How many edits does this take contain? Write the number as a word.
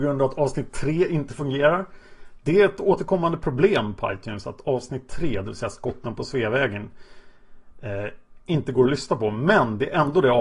zero